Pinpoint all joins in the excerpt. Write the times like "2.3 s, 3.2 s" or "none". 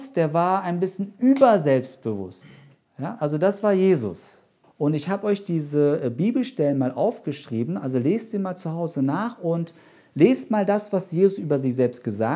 4.6 s